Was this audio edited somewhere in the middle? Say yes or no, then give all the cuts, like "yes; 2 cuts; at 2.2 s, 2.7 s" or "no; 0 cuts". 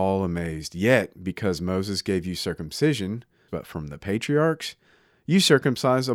yes; 1 cut; at 3.5 s